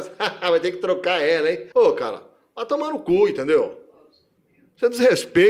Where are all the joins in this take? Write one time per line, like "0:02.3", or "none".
0:01.7